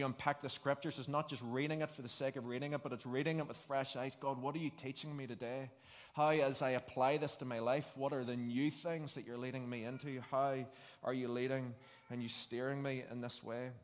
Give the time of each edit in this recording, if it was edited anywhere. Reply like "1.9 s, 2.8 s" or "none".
none